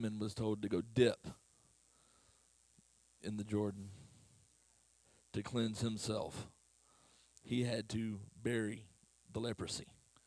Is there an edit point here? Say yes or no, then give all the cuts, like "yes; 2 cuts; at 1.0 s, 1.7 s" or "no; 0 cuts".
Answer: no; 0 cuts